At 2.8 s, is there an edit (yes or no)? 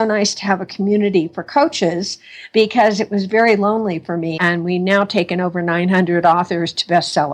no